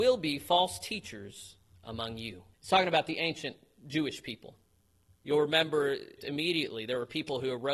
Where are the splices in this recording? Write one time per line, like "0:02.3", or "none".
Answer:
0:02.5
0:06.2

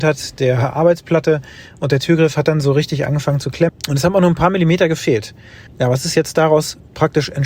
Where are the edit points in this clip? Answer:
0:03.7
0:05.7

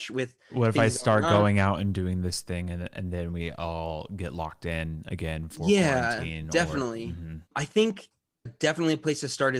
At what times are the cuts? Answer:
0:07.5

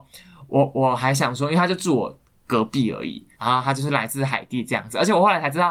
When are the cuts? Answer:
0:03.4

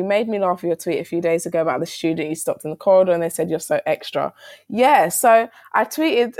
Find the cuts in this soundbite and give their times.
none

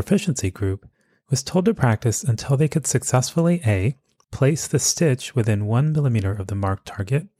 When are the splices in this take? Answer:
0:04.2

